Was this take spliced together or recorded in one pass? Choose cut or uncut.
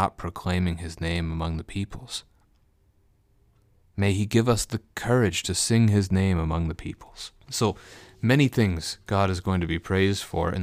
cut